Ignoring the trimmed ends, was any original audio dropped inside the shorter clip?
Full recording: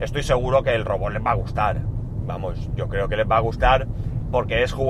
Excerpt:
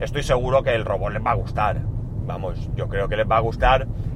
no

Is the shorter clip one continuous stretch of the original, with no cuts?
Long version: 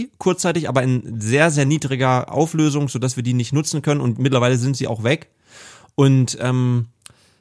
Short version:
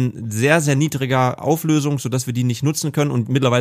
yes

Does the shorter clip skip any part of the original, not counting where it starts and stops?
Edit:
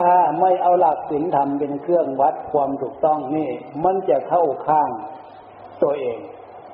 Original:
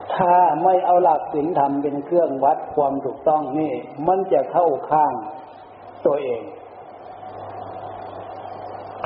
no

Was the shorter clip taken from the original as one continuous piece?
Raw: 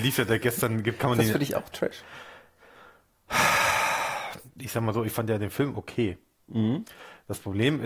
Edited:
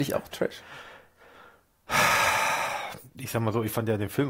yes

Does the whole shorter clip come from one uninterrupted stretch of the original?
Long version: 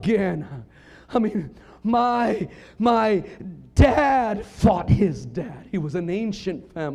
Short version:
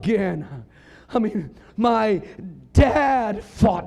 no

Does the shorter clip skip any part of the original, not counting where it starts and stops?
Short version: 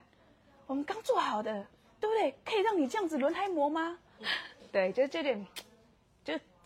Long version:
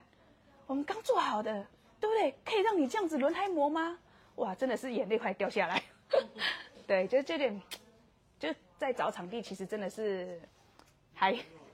yes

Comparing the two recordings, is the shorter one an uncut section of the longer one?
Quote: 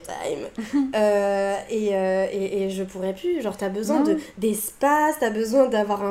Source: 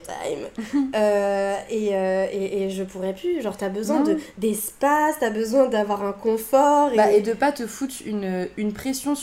yes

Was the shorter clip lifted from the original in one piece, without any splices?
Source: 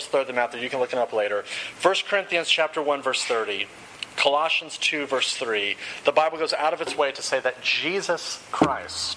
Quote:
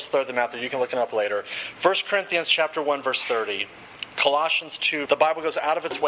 no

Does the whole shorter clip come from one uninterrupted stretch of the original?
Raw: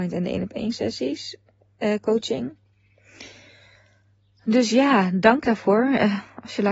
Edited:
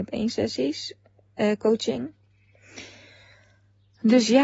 yes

